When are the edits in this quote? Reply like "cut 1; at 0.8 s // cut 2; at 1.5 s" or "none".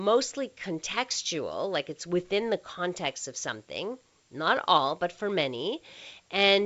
none